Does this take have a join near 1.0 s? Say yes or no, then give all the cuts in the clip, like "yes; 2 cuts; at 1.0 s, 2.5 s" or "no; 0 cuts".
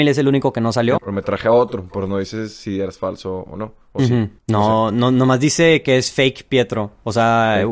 yes; 1 cut; at 1.0 s